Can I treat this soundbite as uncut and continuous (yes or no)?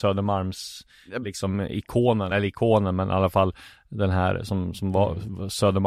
yes